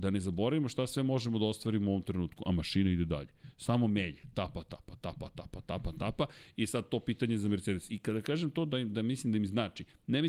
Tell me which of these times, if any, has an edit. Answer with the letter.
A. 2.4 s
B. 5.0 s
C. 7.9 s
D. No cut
C